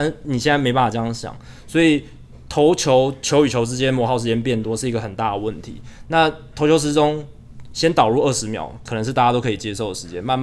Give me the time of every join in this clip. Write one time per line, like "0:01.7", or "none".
none

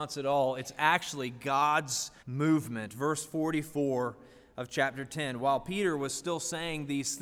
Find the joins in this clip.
0:02.2

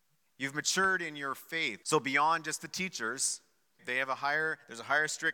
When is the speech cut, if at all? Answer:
0:01.8
0:03.8

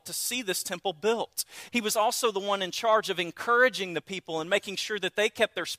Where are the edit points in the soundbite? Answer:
0:01.7

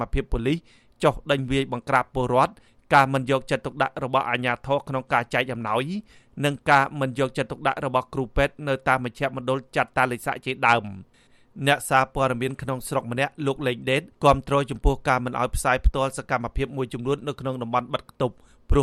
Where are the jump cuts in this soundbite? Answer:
0:14.1

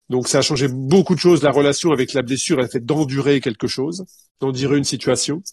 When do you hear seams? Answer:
none

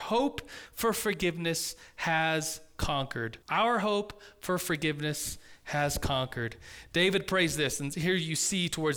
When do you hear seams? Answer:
0:03.4

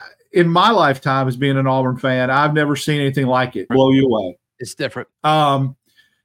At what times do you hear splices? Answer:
0:03.7
0:05.1

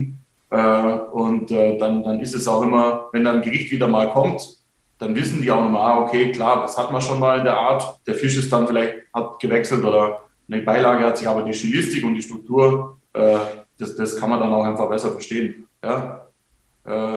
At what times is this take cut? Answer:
0:08.0
0:15.7

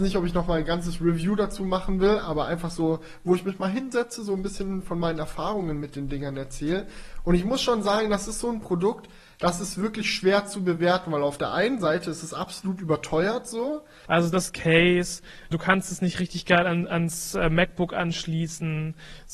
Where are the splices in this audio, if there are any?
0:14.1
0:15.5

